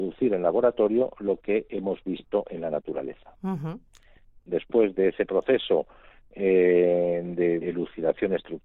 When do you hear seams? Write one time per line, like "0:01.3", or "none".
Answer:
0:07.6